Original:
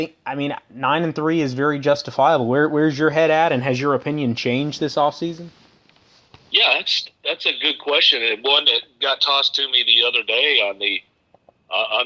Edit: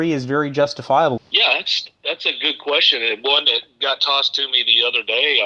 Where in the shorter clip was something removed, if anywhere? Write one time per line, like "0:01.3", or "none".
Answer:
0:01.2